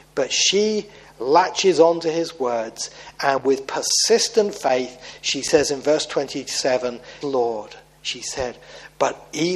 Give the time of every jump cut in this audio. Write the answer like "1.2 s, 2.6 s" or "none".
7.2 s